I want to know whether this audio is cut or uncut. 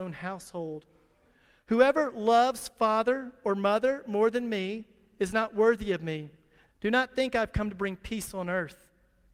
cut